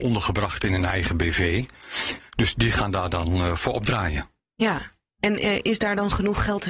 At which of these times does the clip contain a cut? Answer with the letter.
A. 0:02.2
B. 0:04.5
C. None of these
A